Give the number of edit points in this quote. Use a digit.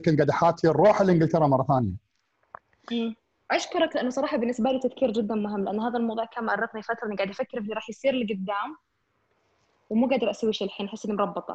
1